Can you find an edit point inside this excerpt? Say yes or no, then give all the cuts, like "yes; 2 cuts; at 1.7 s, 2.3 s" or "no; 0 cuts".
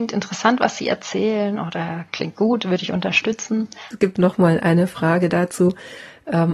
yes; 1 cut; at 3.9 s